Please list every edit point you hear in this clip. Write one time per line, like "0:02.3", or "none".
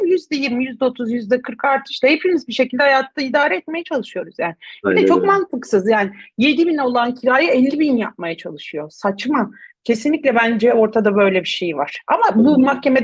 none